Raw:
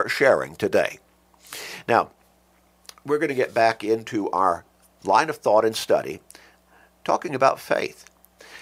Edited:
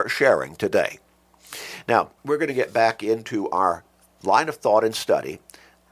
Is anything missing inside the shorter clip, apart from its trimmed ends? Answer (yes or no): yes